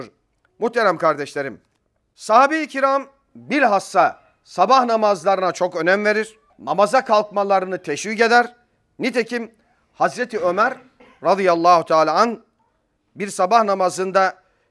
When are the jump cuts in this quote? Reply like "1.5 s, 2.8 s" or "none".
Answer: 6.5 s